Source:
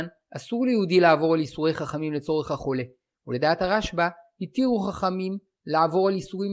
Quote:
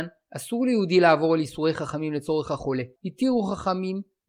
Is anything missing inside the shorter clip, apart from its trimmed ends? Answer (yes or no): yes